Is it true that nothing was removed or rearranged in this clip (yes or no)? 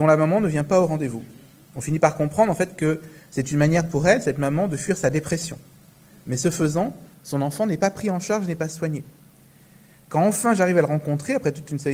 yes